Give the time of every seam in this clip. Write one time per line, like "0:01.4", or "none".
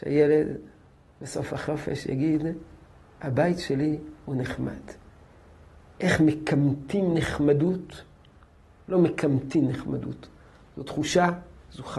none